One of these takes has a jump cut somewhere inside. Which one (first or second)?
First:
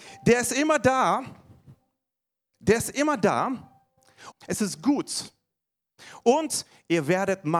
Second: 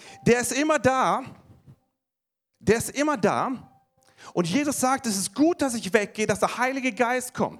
first